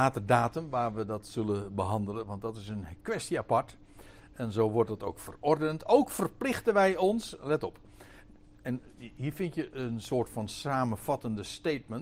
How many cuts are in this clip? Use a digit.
1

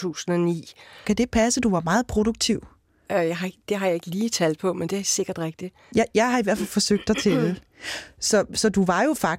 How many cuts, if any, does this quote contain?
1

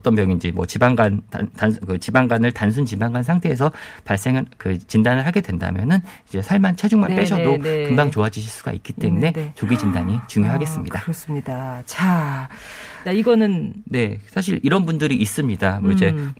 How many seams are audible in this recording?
1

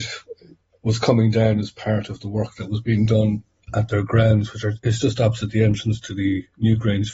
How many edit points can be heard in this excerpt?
0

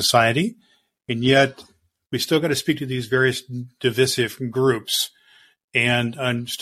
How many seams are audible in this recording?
1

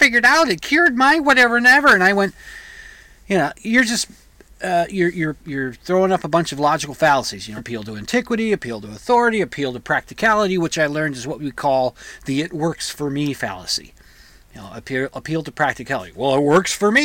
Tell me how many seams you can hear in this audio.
2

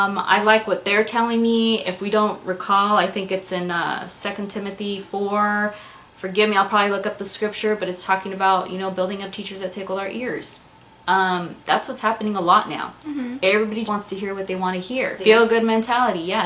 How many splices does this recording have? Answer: 2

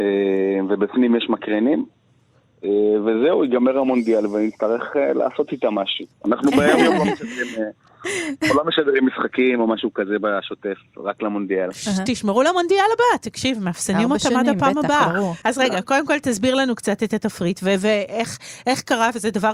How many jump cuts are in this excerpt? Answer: 1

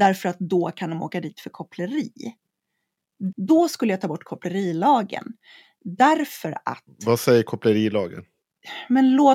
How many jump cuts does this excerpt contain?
1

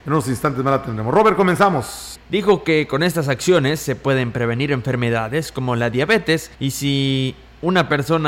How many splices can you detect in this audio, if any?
2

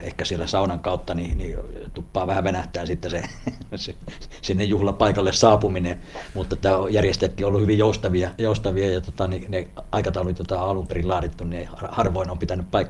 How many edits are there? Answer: 0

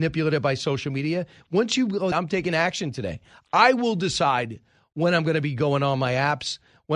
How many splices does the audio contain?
1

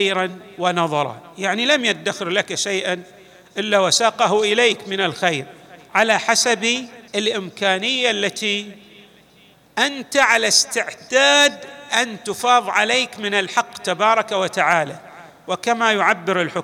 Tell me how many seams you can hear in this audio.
1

